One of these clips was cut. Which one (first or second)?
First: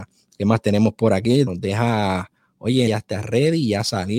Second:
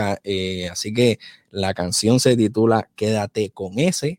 first